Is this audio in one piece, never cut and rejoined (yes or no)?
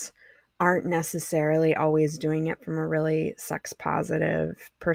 yes